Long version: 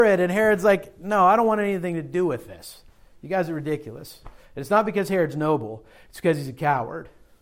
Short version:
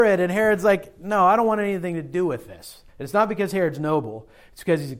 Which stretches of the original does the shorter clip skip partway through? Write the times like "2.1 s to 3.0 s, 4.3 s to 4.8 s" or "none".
2.9 s to 4.4 s